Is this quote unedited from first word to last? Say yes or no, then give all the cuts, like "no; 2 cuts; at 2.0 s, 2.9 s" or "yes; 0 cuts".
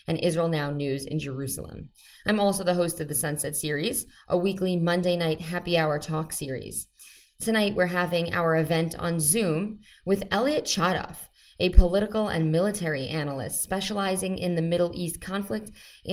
yes; 0 cuts